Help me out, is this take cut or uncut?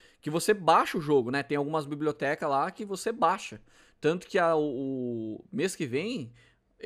uncut